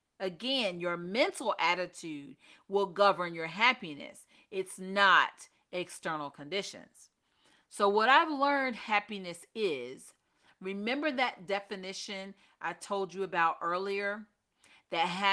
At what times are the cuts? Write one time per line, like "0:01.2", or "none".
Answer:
none